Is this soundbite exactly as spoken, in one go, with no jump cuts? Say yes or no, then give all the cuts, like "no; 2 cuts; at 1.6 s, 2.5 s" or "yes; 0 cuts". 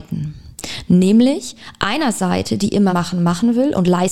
no; 1 cut; at 2.9 s